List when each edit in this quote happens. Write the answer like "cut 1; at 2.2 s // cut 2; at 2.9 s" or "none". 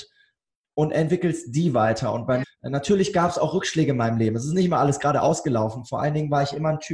cut 1; at 2.4 s